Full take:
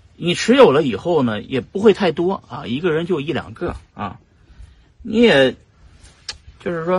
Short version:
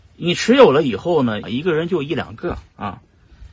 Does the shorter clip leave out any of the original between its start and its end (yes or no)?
yes